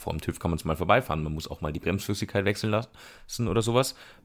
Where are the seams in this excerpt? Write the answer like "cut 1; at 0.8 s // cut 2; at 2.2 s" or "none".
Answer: none